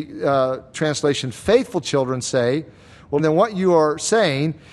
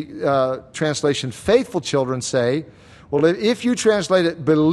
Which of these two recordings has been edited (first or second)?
first